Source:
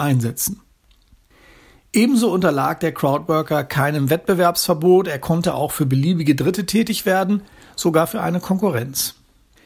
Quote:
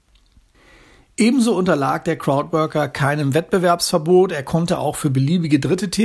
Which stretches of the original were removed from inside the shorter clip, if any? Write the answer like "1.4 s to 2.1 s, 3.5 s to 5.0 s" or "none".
none